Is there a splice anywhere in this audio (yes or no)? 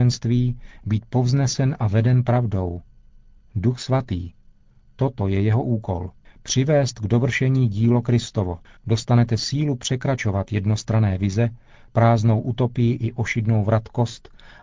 yes